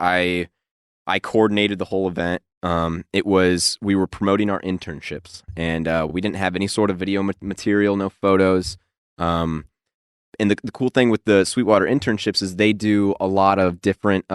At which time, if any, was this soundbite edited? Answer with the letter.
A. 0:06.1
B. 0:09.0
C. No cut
C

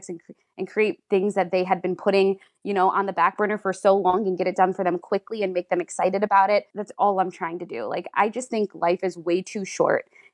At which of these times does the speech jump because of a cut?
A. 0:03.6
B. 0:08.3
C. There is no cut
C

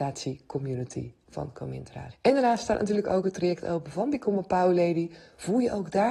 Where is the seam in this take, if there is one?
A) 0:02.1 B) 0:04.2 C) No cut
A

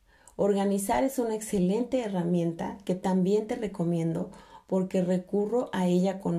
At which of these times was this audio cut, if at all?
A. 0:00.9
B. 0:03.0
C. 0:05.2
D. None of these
D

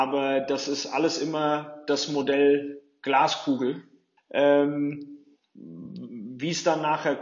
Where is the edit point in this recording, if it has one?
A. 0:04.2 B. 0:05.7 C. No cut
A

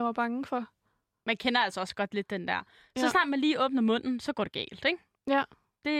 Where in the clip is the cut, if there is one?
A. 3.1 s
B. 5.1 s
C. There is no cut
C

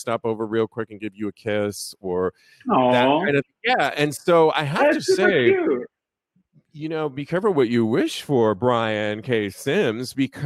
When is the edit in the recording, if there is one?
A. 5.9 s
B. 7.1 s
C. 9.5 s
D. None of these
D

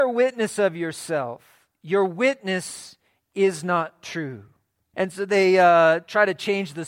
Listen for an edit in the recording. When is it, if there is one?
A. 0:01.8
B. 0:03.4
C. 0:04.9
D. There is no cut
C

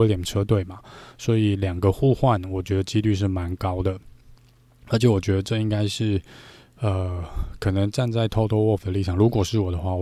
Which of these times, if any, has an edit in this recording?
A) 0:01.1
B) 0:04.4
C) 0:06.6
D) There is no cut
D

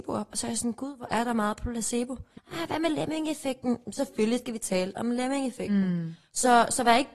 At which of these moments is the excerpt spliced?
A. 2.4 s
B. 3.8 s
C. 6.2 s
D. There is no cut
A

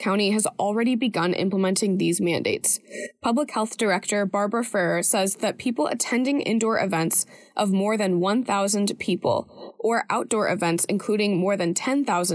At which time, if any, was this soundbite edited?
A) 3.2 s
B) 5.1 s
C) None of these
C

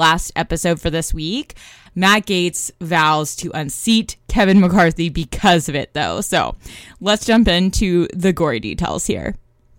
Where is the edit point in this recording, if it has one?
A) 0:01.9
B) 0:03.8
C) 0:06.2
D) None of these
A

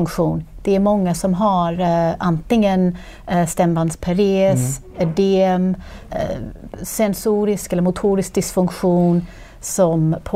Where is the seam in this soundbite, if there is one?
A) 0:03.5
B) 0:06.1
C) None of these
B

